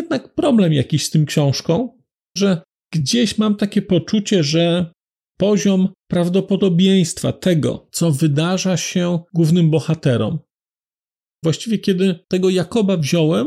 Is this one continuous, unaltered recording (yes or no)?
no